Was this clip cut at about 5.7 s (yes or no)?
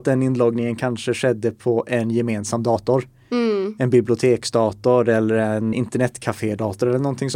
yes